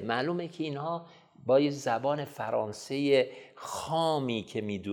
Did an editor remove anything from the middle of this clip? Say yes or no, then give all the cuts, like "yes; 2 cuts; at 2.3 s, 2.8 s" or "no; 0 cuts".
no; 0 cuts